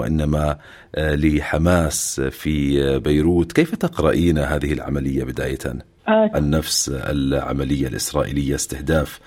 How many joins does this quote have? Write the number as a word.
one